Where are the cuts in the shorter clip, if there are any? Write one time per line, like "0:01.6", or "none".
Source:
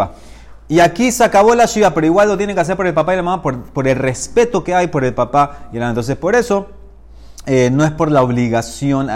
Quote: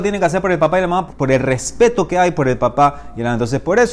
0:01.1